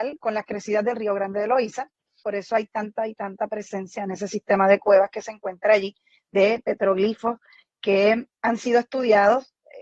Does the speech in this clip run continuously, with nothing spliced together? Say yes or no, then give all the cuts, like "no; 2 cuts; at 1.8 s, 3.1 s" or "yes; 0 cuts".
no; 1 cut; at 2.2 s